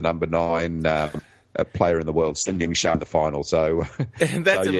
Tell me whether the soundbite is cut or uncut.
uncut